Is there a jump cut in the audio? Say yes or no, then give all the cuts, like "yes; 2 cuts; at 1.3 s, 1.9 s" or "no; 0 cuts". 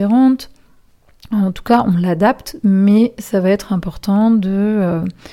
no; 0 cuts